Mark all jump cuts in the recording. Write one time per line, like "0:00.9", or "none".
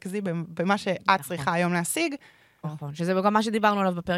0:02.6